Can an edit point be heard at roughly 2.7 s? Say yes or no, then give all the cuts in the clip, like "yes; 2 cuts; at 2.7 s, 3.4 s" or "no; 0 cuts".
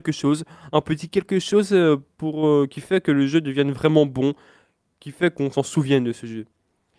no; 0 cuts